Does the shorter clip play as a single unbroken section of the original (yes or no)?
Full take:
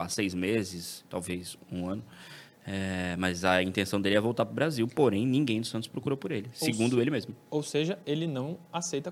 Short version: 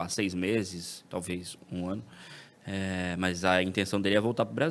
yes